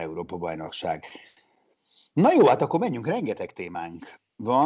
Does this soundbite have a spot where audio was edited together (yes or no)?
no